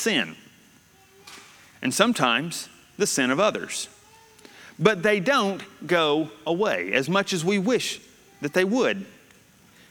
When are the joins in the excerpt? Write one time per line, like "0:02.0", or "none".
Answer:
none